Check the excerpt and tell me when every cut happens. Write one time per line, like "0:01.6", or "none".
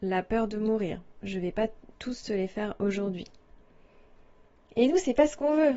none